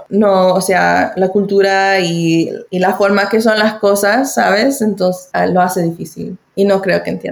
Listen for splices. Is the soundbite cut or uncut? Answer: uncut